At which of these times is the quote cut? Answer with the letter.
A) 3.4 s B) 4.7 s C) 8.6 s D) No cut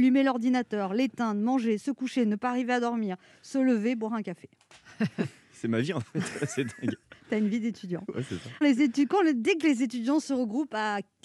C